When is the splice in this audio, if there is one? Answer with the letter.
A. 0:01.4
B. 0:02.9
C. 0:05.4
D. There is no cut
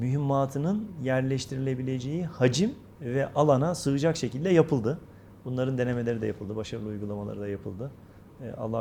B